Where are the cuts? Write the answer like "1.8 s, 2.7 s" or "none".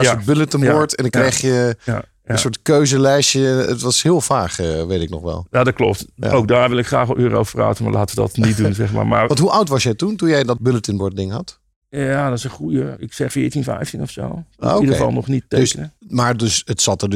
13.3 s